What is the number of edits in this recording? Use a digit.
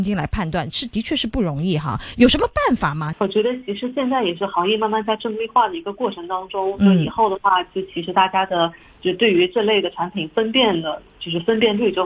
1